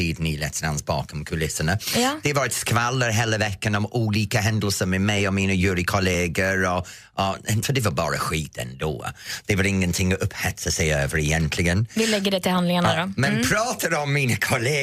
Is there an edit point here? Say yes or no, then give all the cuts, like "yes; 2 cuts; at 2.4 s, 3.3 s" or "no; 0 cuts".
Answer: yes; 1 cut; at 7.6 s